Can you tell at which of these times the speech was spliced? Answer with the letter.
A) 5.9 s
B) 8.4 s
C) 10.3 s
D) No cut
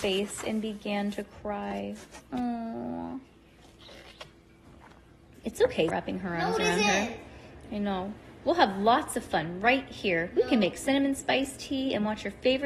A